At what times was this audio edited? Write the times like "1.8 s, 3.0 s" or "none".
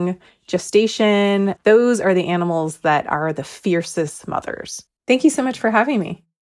1.6 s, 4.9 s